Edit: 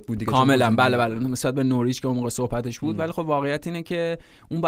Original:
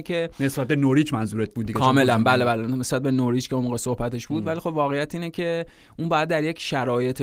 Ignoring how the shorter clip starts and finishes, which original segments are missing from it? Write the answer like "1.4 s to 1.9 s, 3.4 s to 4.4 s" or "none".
none